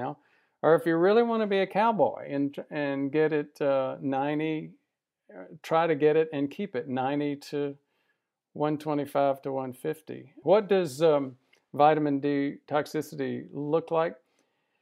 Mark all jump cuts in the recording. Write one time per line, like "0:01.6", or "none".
0:10.4

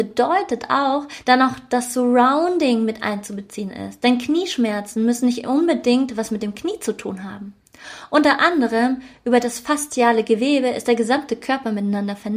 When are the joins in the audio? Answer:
0:01.2

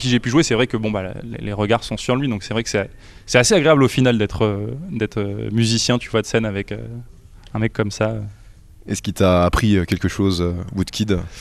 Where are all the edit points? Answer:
none

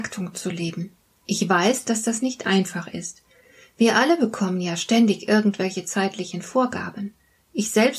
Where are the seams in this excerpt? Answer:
none

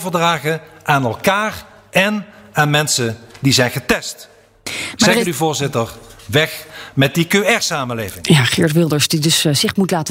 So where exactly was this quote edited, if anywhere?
none

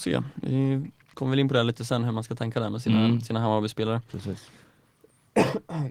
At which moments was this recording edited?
none

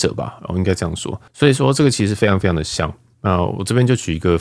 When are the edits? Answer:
0:01.3

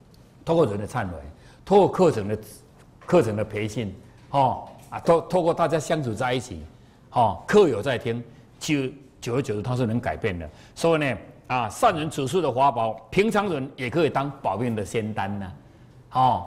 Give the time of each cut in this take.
none

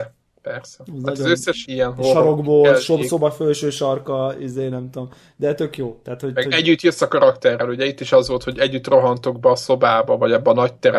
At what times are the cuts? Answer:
0:01.6

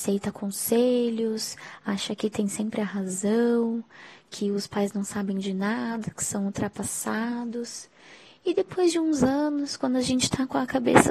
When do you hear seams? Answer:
none

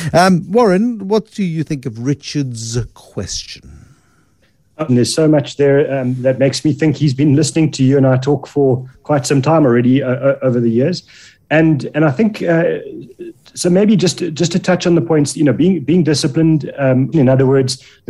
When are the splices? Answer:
0:04.9
0:17.1

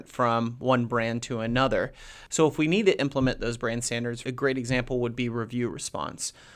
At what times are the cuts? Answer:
0:02.3
0:04.2

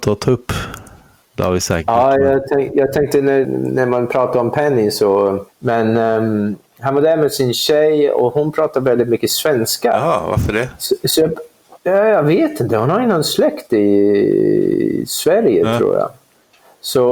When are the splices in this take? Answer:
0:03.4
0:05.5

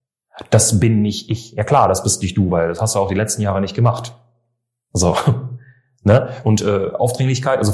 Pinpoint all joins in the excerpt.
none

